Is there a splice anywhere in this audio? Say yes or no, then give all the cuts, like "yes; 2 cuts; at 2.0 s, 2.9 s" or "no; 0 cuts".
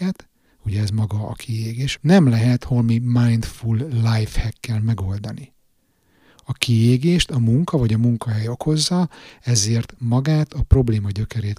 yes; 1 cut; at 2.0 s